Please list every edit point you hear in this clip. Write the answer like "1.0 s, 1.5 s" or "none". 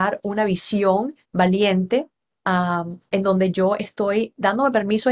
1.2 s